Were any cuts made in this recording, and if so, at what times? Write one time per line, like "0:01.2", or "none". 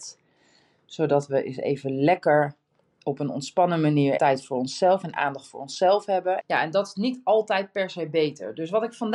0:04.2
0:06.4